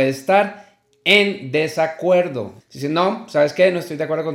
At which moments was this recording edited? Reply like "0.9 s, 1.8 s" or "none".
2.6 s